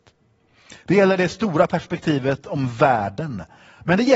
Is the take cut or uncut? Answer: uncut